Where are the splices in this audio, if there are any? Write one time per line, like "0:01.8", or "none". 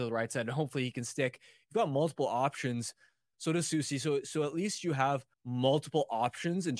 0:03.3
0:05.3